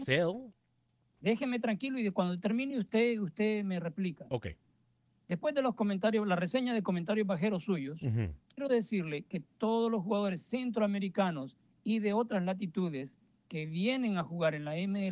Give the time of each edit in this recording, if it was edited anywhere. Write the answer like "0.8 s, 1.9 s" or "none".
none